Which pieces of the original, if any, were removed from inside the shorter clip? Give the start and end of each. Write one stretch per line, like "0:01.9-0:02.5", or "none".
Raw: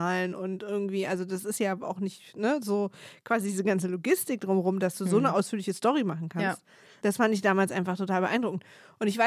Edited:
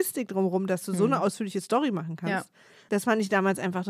none